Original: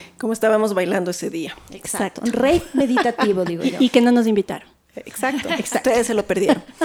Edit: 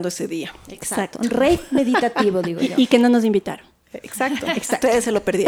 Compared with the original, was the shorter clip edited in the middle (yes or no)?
no